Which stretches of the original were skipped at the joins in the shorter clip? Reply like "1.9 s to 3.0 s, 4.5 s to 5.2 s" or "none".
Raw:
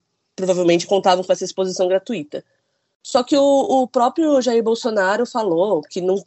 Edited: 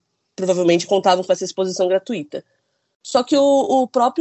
none